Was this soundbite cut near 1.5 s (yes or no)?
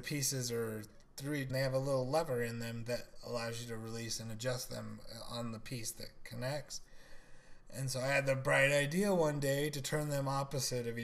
yes